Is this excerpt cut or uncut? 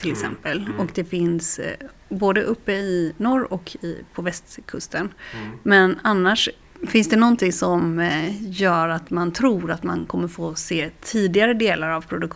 uncut